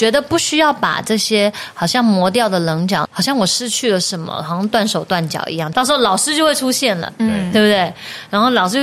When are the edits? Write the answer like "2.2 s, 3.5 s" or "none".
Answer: 3.0 s, 5.7 s